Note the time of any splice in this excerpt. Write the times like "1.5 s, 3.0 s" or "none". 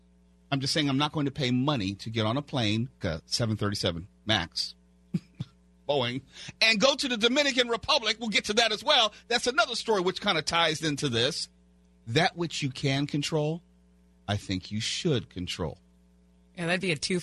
3.0 s